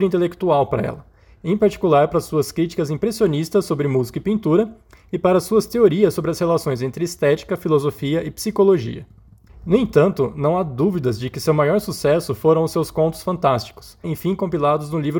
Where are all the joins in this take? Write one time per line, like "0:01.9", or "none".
0:09.5
0:14.0